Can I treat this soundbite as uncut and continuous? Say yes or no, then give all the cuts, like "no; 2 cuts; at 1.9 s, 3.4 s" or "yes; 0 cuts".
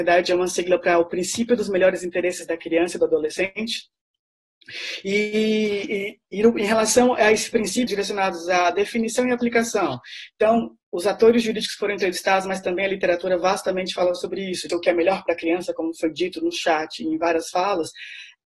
no; 2 cuts; at 7.9 s, 14.7 s